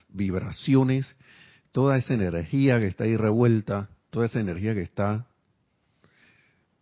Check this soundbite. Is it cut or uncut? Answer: uncut